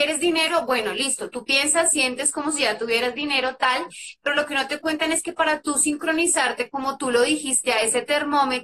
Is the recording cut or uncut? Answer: uncut